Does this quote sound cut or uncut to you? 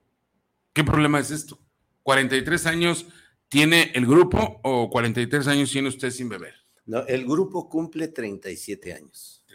uncut